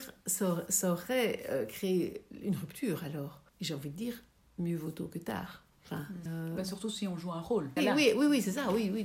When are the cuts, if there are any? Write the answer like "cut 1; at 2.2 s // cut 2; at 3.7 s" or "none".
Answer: cut 1; at 3.5 s // cut 2; at 6.3 s // cut 3; at 7.8 s